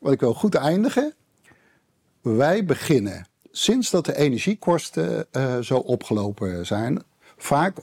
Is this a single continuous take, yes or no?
yes